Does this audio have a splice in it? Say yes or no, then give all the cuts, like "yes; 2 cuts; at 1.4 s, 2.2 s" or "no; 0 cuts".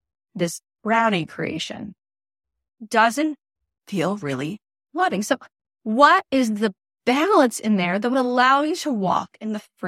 no; 0 cuts